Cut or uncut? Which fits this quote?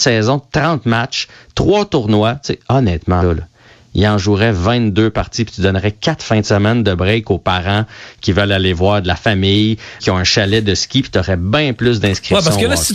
cut